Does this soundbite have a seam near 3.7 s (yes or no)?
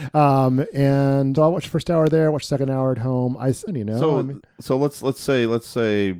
yes